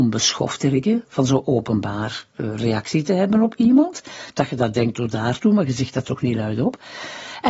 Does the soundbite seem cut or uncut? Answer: uncut